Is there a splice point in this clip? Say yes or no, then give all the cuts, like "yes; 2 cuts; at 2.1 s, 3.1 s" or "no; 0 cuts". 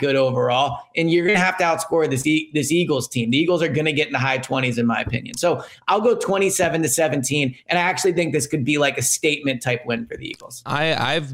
no; 0 cuts